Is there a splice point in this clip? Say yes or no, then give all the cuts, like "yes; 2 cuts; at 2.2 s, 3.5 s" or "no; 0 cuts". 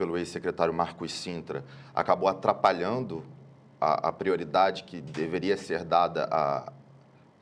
no; 0 cuts